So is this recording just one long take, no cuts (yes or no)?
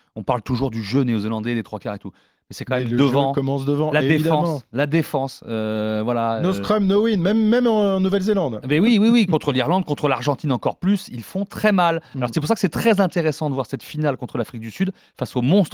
yes